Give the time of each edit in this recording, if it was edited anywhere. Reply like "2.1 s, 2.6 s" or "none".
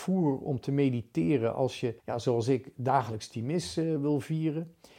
2.0 s